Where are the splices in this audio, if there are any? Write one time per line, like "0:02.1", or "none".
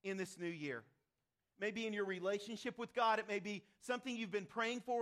none